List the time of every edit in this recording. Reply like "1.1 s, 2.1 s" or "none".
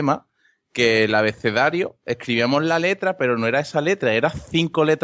none